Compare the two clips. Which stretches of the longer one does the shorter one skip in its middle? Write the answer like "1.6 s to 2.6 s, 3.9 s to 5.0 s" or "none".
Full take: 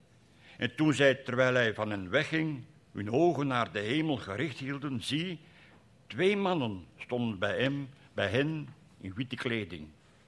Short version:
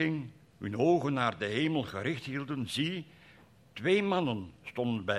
none